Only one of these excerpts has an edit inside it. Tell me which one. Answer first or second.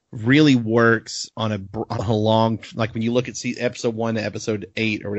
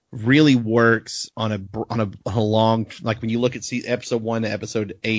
first